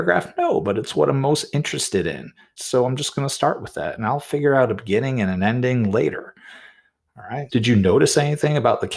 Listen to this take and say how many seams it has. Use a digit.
2